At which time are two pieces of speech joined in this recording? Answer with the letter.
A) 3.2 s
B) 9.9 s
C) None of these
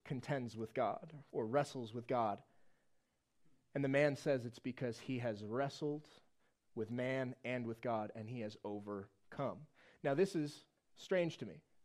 C